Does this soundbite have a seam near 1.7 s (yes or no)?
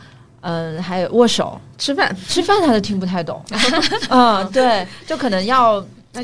no